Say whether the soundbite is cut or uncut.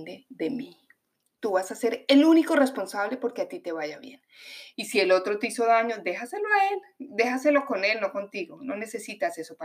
cut